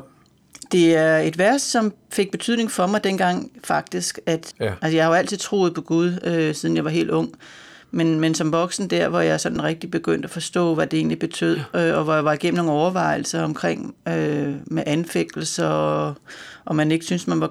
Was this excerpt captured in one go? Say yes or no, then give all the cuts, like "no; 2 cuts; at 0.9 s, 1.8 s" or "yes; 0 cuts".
no; 1 cut; at 4.5 s